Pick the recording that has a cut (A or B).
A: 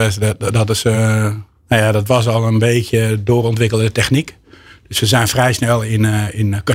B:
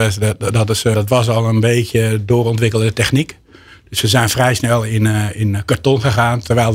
B